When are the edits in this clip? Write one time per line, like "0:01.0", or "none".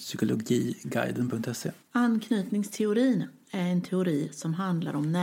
0:01.8